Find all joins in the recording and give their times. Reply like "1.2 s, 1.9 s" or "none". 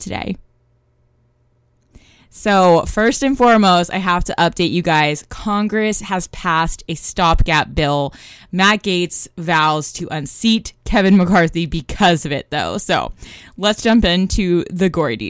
none